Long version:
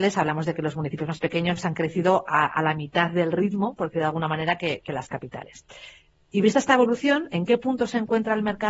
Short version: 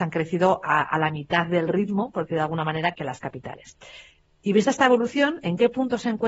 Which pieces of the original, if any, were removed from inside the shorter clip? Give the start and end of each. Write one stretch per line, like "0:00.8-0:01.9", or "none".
0:04.6-0:04.8